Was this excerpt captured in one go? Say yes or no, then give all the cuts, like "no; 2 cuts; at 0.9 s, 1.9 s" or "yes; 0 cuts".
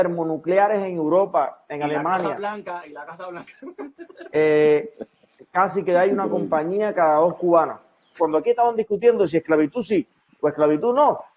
no; 2 cuts; at 4.3 s, 8.2 s